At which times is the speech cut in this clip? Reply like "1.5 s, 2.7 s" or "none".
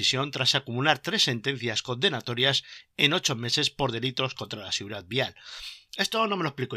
none